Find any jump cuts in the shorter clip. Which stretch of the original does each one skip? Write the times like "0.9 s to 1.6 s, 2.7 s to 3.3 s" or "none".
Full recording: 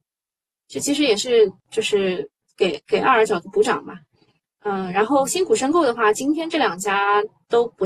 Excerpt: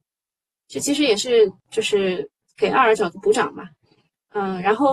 2.5 s to 2.8 s